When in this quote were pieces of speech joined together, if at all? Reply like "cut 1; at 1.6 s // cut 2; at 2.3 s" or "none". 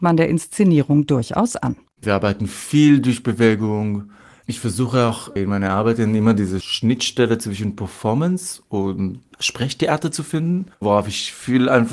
cut 1; at 10.7 s